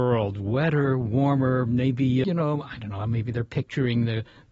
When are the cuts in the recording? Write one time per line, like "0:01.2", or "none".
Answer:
0:02.2